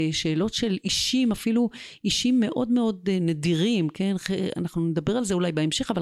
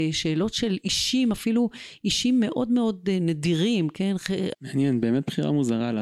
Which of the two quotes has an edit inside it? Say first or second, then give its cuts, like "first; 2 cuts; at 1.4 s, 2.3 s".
second; 1 cut; at 4.5 s